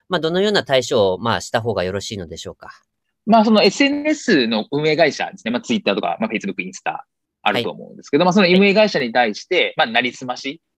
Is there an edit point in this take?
no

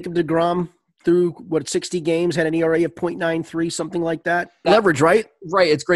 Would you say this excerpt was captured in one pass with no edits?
no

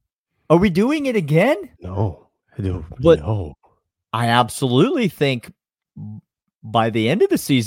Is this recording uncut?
no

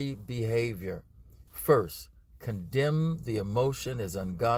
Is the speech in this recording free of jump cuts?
no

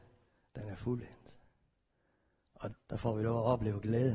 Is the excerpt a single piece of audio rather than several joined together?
no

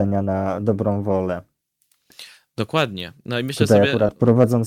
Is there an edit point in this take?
no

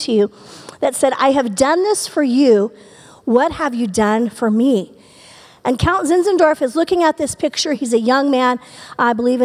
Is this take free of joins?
yes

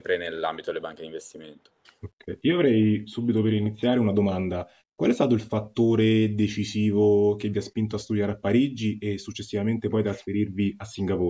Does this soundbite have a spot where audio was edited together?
no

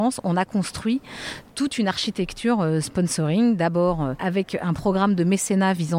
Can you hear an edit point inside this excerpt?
no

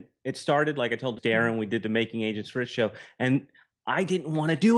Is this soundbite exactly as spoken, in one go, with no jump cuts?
no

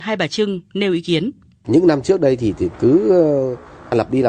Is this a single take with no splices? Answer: no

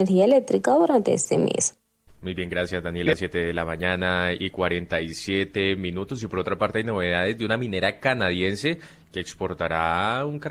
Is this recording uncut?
yes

